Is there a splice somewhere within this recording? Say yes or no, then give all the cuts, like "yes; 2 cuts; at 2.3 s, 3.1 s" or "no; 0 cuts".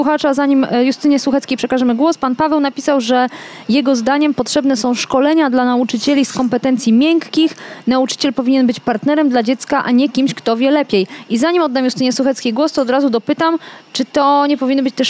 no; 0 cuts